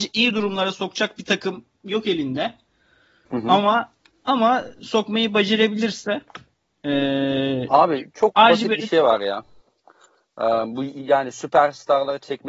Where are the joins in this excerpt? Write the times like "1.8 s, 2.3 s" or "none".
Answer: none